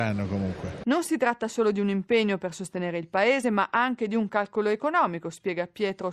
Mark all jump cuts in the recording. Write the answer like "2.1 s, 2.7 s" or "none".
none